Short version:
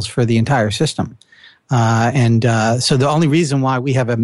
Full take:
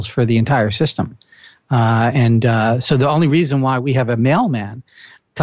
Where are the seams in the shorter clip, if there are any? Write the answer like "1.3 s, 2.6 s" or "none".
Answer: none